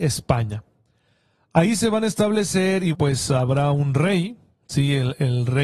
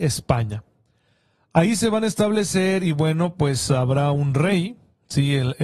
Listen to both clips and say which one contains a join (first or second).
first